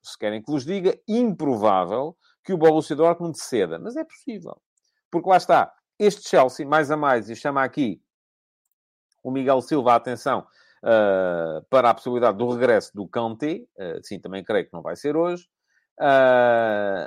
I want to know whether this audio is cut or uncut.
uncut